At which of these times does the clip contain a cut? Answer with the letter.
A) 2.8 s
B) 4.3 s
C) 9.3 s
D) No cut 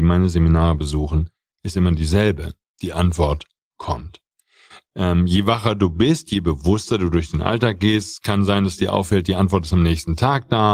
D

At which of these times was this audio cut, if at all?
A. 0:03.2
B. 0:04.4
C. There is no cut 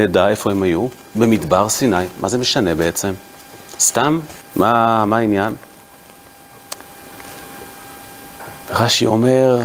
B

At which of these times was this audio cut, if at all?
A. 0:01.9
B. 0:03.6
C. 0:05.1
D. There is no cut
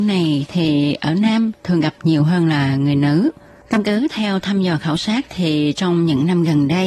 B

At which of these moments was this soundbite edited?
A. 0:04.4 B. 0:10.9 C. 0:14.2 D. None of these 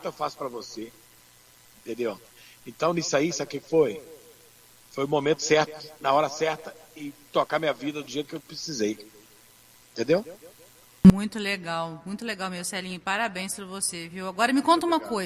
D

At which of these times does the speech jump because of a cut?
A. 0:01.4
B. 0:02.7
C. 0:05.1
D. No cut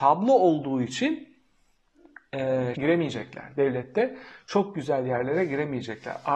B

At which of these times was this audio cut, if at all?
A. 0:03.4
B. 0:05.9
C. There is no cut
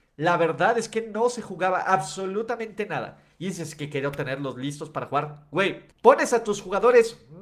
B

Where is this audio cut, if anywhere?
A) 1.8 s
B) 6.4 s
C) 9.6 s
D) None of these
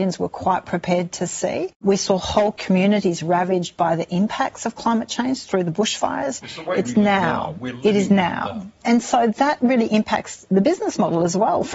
B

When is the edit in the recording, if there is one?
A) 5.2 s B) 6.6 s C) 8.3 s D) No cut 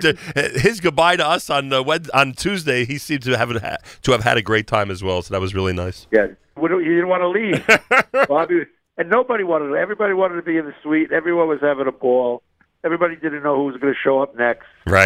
B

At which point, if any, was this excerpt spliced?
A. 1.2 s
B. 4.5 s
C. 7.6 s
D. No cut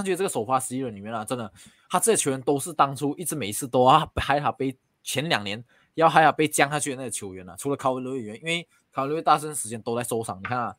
D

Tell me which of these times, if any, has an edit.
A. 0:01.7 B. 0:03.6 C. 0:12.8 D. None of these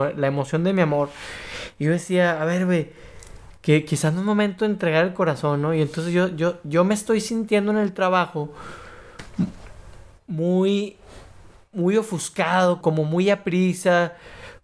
C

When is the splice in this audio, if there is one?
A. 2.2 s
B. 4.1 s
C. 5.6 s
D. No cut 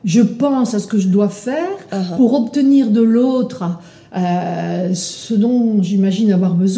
D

